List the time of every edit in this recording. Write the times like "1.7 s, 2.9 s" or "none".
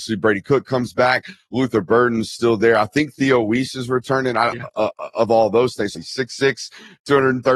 4.5 s, 5.9 s